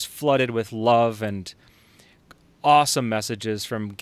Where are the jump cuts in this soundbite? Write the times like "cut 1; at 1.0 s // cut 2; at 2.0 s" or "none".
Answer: none